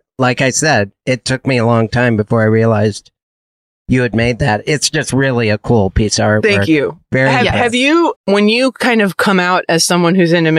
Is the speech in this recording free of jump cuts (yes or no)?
no